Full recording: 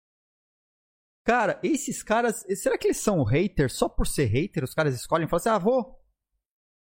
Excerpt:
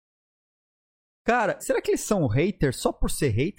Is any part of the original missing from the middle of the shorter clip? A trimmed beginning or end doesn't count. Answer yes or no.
yes